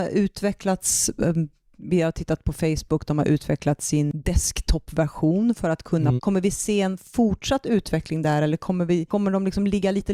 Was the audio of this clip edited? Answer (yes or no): yes